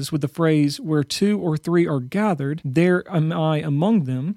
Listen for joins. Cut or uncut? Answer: uncut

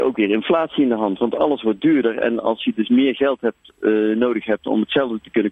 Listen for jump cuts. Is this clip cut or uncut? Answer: uncut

